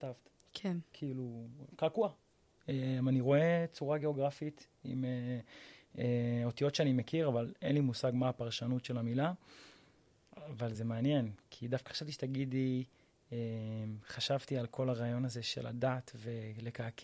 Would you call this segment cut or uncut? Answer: cut